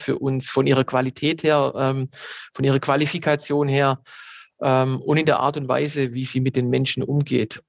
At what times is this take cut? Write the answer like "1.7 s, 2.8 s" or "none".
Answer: none